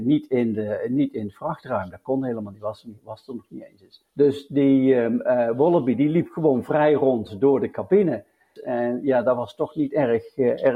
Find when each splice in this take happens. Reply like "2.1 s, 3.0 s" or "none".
4.1 s, 8.6 s